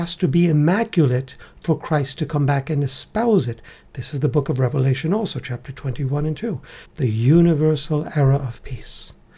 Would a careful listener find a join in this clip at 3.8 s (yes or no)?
no